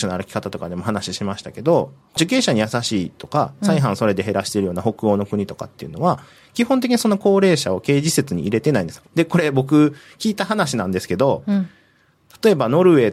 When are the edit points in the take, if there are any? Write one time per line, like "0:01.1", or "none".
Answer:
0:09.0